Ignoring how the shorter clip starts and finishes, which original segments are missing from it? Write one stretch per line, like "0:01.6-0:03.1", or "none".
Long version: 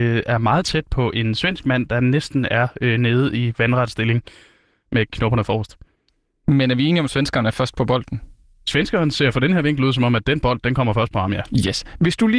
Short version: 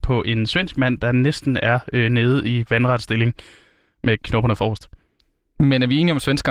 none